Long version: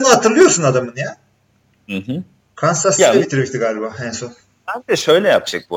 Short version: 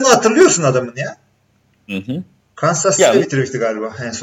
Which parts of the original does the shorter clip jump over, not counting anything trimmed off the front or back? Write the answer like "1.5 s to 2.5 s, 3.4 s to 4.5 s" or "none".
none